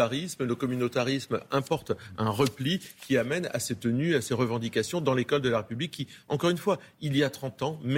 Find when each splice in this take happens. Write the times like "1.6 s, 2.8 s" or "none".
none